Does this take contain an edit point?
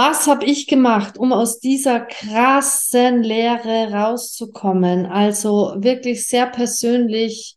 no; 0 cuts

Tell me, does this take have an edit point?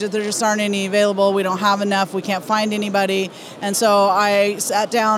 no; 0 cuts

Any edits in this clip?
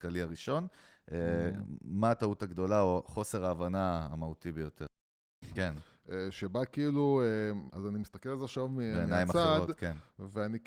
yes; 2 cuts; at 5.6 s, 7.7 s

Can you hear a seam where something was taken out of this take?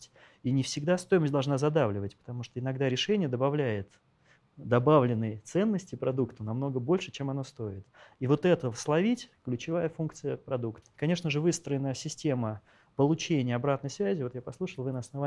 yes; 1 cut; at 10.8 s

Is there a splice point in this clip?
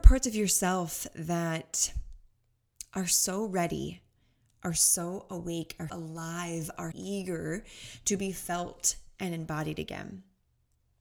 yes; 2 cuts; at 5.9 s, 6.9 s

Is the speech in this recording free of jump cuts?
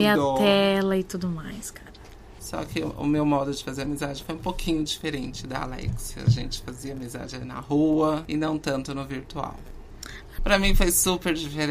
no; 3 cuts; at 2.4 s, 8.2 s, 10.4 s

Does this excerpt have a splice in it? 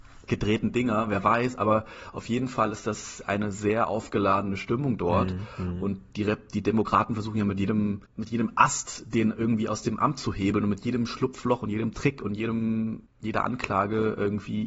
no; 0 cuts

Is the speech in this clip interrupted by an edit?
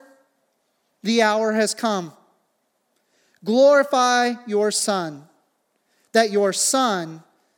no; 0 cuts

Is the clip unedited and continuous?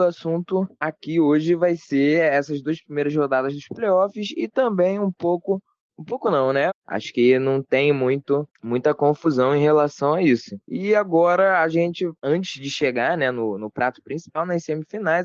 no; 1 cut; at 6.7 s

